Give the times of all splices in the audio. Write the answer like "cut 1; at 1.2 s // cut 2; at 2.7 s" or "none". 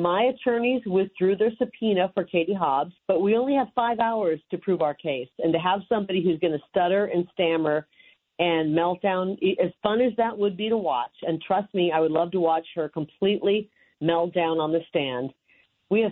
cut 1; at 3.0 s